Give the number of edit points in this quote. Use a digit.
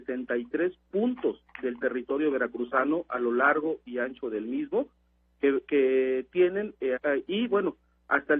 1